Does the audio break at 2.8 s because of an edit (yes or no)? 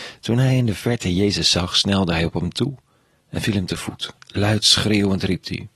no